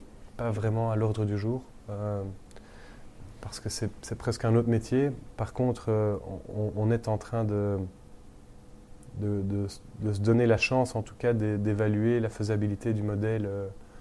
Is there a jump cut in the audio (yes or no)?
no